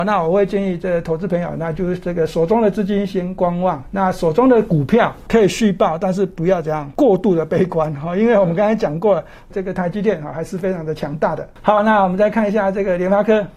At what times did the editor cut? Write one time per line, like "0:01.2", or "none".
0:09.5